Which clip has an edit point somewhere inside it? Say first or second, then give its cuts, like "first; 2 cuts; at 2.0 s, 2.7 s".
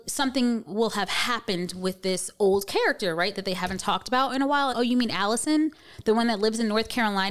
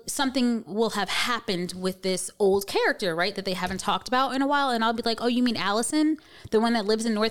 first; 1 cut; at 4.7 s